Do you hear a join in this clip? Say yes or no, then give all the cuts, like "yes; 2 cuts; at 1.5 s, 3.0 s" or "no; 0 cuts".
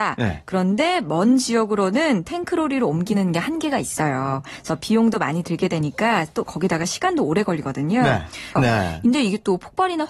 yes; 1 cut; at 8.6 s